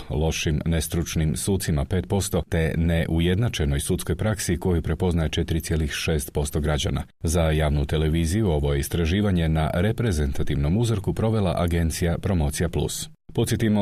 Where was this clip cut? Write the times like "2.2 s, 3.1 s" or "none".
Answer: none